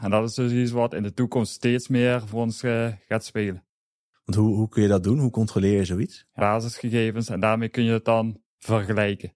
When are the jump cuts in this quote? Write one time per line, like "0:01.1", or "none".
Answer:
0:06.4